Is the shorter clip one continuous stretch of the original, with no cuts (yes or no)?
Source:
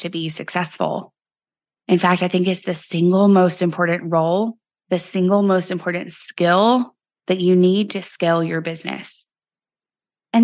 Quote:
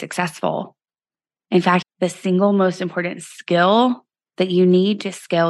no